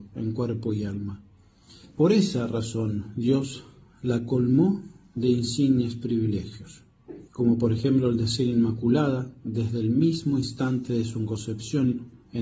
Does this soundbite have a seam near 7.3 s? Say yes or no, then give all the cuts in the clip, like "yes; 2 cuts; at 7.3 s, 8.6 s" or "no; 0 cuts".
yes; 2 cuts; at 1.9 s, 7.3 s